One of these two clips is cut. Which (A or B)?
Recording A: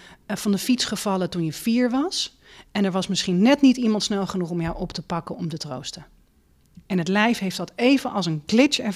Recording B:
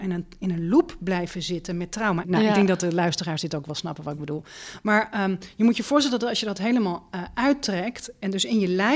B